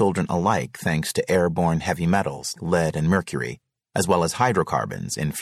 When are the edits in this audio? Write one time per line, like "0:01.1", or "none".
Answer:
0:02.6